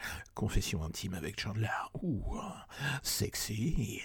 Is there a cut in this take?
no; 0 cuts

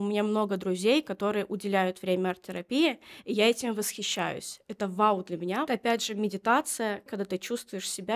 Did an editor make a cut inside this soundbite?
yes; 2 cuts; at 5.7 s, 7.1 s

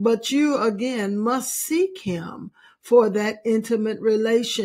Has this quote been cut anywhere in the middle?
no; 0 cuts

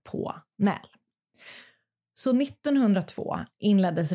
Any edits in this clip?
no; 0 cuts

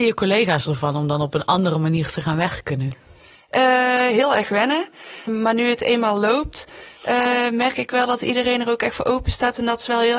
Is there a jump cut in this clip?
yes; 1 cut; at 5.3 s

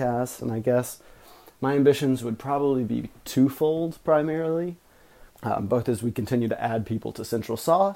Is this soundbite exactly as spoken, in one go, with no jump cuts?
no; 1 cut; at 5.3 s

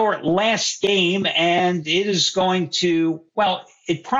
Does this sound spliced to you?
no; 0 cuts

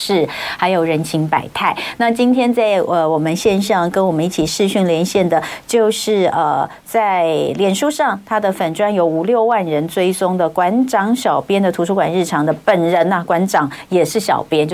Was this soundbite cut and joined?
no; 0 cuts

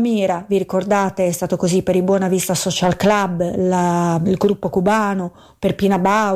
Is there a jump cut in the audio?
no; 0 cuts

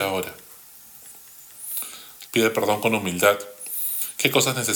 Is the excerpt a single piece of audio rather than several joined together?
no; 1 cut; at 2.3 s

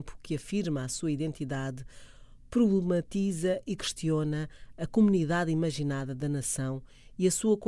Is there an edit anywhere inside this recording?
no; 0 cuts

